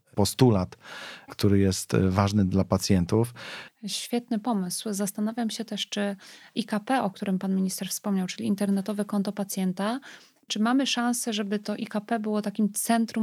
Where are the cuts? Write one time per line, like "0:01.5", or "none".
0:03.7